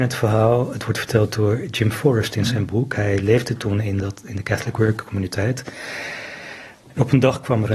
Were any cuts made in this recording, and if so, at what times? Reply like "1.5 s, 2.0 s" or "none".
6.8 s